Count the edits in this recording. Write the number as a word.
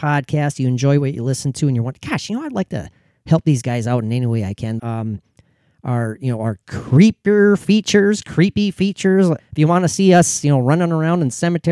two